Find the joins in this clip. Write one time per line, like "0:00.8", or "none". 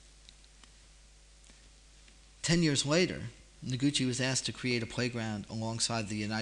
none